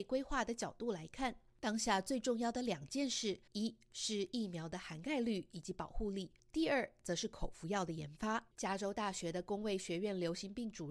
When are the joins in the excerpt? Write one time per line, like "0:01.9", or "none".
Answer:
0:03.5
0:08.5